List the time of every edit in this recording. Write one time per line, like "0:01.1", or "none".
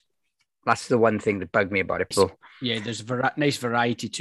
0:02.1